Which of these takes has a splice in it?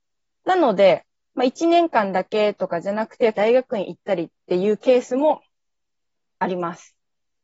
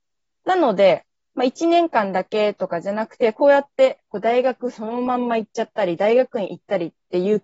first; 1 cut; at 3.3 s

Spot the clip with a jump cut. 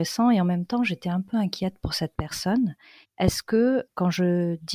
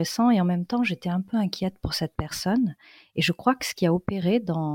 first; 1 cut; at 3.0 s

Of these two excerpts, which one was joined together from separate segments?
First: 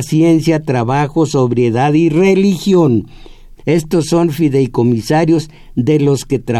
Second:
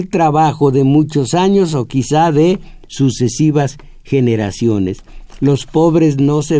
first; 1 cut; at 3.6 s

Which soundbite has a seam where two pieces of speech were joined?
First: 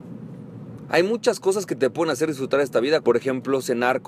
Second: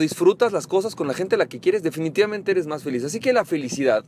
first; 1 cut; at 3.0 s

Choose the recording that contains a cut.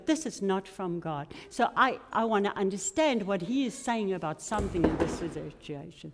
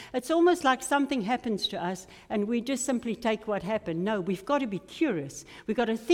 first; 1 cut; at 2.1 s

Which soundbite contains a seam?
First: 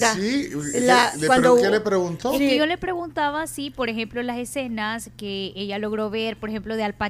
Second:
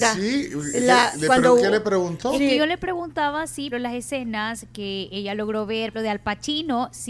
second; 2 cuts; at 3.7 s, 5.9 s

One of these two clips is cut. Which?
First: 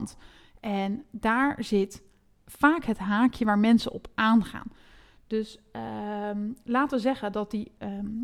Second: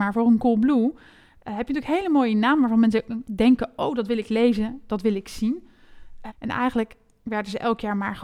second; 1 cut; at 6.3 s

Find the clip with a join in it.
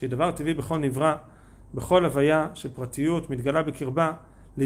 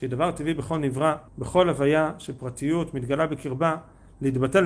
second; 1 cut; at 1.3 s

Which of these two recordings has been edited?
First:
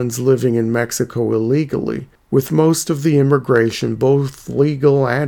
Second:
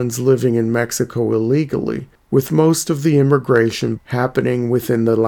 second; 1 cut; at 4.0 s

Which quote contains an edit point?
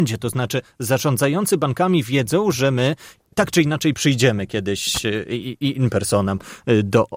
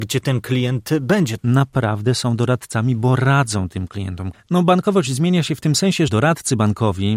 second; 3 cuts; at 1.4 s, 4.3 s, 6.1 s

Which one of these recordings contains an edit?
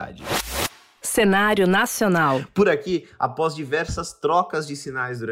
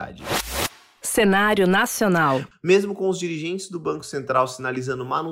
second; 1 cut; at 2.5 s

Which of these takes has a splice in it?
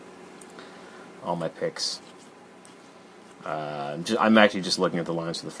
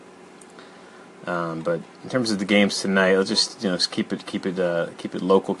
first; 1 cut; at 1.2 s

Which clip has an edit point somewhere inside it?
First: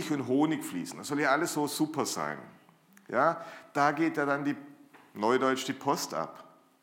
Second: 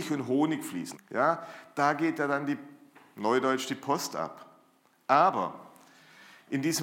second; 1 cut; at 0.9 s

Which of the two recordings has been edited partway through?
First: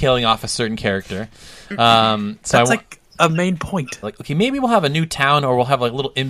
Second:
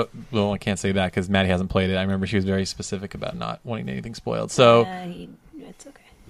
first; 1 cut; at 4.0 s

